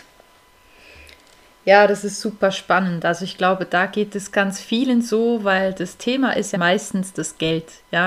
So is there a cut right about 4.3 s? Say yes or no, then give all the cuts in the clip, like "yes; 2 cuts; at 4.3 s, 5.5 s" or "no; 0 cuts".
yes; 2 cuts; at 4.3 s, 6.5 s